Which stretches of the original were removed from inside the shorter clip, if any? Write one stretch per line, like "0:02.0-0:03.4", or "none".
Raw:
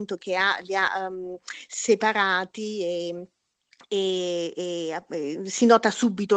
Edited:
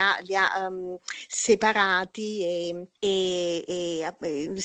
0:03.3-0:03.8